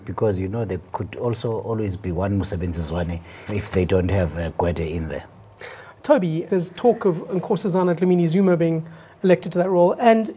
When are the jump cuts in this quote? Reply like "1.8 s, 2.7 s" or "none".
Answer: 3.5 s, 6.5 s